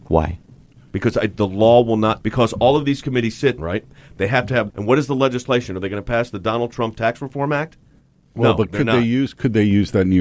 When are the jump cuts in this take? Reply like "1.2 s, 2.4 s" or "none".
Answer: 2.2 s, 3.6 s, 4.7 s